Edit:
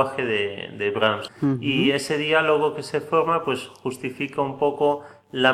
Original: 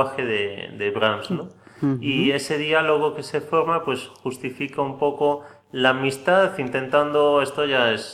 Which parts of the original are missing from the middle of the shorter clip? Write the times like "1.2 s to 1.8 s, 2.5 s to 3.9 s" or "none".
1.3 s to 1.7 s